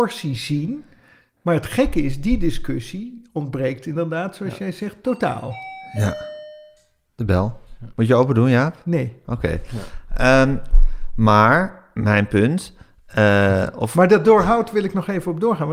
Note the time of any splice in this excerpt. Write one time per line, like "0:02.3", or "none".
none